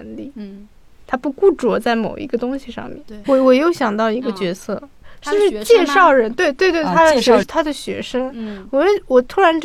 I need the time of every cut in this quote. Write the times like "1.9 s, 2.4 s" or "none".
7.4 s